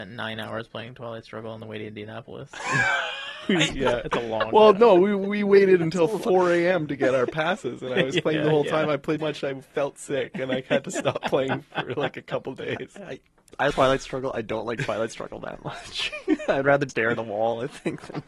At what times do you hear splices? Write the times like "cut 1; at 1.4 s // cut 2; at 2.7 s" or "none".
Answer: cut 1; at 9.2 s // cut 2; at 13.7 s // cut 3; at 16.9 s